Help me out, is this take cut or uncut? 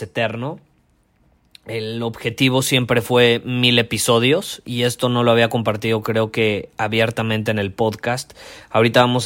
uncut